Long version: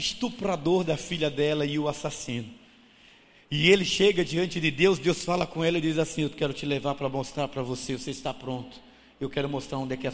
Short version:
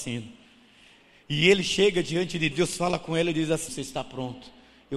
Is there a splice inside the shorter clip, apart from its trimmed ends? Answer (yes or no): yes